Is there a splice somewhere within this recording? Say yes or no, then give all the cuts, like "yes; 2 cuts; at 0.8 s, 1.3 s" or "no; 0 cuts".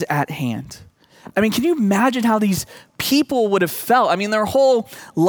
no; 0 cuts